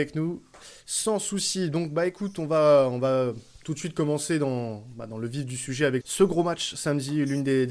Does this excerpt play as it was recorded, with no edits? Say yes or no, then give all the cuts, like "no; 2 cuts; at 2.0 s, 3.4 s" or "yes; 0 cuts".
no; 1 cut; at 6.0 s